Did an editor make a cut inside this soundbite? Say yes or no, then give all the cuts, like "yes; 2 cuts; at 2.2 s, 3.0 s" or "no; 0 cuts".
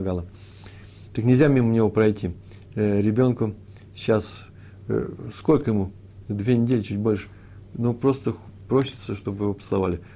no; 0 cuts